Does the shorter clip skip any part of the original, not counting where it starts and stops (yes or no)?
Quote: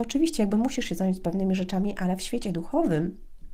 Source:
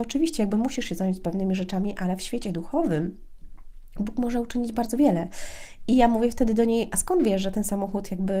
no